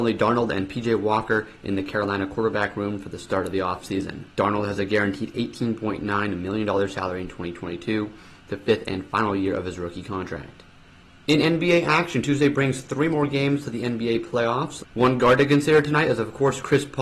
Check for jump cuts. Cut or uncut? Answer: cut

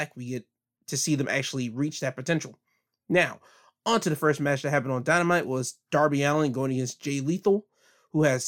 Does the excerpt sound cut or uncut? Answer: uncut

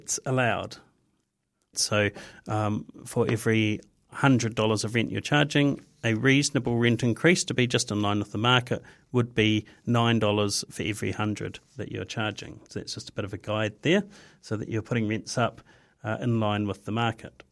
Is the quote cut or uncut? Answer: cut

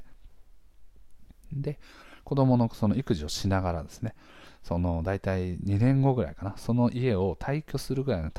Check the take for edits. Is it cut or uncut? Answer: uncut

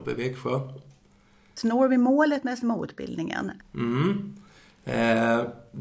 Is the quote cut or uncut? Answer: cut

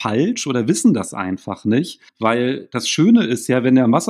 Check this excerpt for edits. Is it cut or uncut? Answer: cut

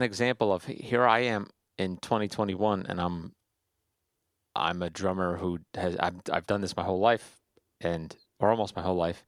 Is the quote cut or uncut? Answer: uncut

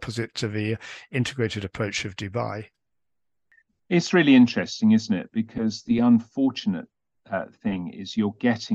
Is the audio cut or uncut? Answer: uncut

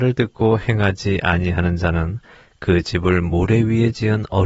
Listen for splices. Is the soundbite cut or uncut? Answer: uncut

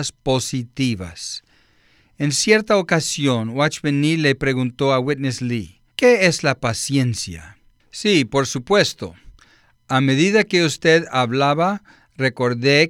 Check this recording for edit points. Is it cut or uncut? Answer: cut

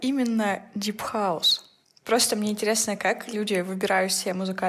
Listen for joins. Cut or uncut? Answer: uncut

